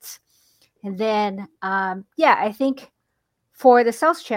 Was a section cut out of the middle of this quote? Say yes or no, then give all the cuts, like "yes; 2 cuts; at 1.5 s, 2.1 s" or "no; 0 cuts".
no; 0 cuts